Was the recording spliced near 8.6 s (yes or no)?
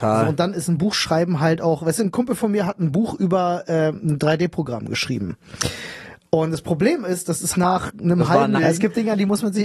yes